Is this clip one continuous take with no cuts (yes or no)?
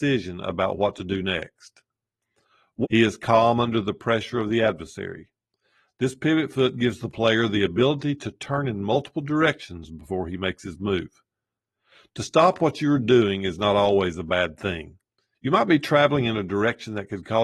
no